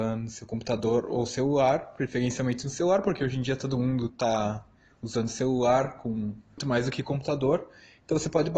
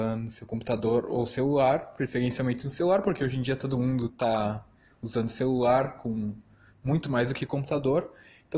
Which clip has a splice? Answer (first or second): first